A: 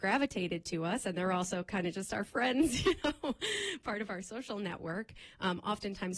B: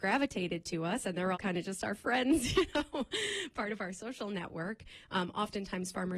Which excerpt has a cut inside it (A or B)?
B